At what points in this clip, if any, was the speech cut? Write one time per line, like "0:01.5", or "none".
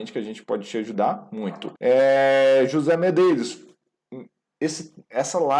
0:01.8